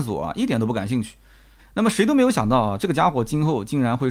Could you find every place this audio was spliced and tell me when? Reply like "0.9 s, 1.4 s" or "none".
1.6 s